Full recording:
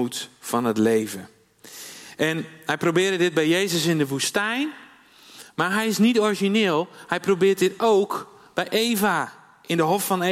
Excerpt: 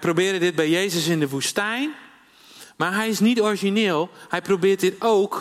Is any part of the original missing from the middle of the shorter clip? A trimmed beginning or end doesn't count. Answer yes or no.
no